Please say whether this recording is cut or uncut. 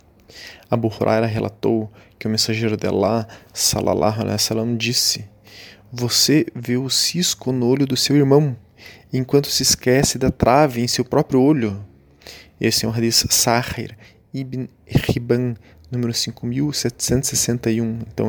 uncut